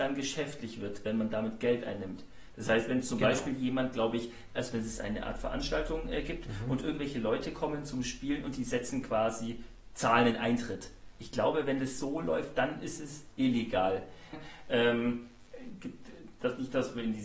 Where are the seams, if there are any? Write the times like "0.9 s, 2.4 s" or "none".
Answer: 4.6 s, 14.3 s